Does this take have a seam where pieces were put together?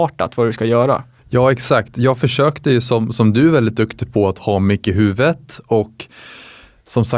no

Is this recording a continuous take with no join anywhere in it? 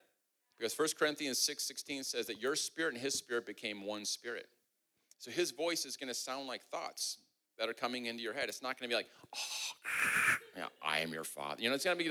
yes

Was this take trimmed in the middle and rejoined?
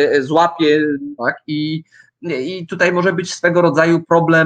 yes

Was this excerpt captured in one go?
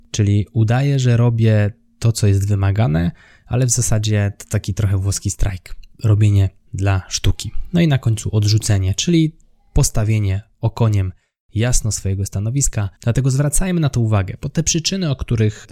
no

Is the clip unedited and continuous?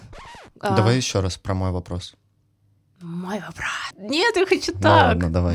no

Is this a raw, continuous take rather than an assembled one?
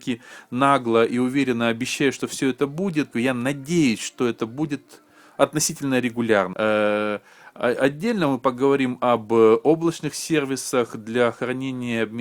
no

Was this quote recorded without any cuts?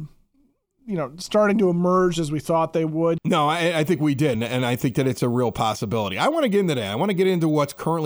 no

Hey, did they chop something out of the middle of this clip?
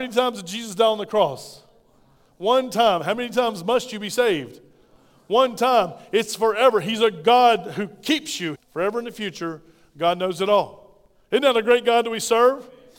yes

